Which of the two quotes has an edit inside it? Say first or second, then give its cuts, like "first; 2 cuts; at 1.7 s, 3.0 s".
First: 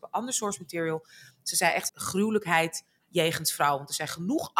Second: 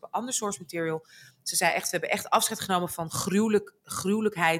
first; 1 cut; at 1.9 s